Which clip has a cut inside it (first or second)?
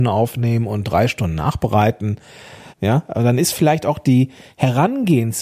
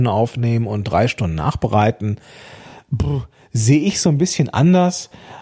first